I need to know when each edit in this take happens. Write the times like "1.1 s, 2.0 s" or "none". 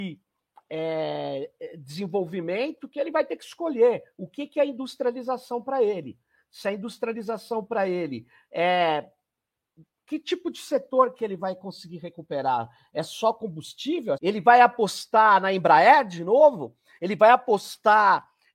14.2 s